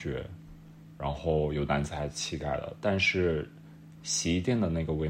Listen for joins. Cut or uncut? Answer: uncut